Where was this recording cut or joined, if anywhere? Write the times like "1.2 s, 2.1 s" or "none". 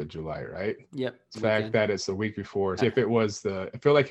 1.3 s, 2.8 s